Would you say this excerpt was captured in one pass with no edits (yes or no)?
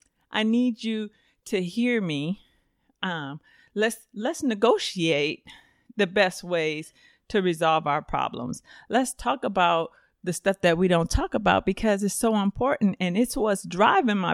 yes